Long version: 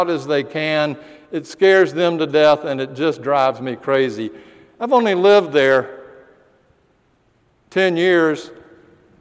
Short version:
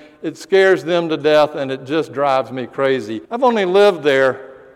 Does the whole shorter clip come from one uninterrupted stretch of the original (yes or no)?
no